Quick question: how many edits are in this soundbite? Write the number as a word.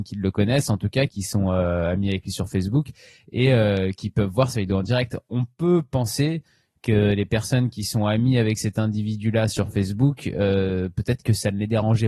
one